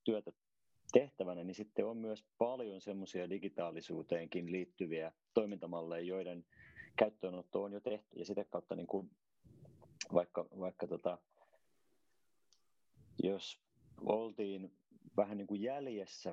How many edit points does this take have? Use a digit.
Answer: 1